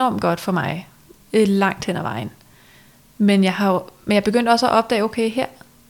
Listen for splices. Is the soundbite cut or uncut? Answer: uncut